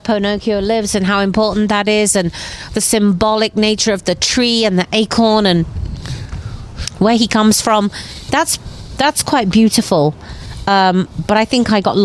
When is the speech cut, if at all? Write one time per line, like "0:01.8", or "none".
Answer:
none